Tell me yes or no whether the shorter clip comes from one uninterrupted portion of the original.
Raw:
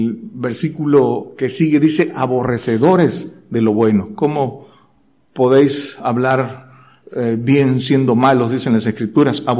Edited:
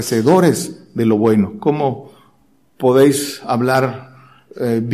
yes